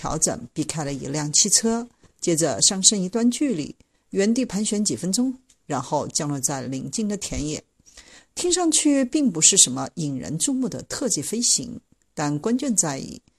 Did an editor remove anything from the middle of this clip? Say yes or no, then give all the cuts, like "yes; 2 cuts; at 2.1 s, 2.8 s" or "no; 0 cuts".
no; 0 cuts